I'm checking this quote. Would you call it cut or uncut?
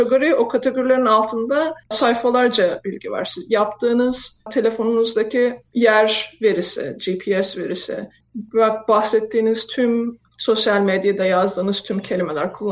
uncut